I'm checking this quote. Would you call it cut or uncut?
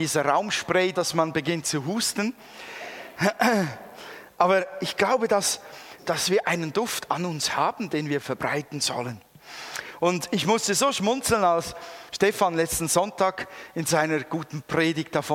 cut